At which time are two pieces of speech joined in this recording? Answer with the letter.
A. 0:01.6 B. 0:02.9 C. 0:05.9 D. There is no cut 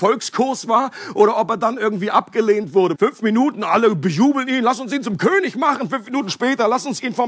B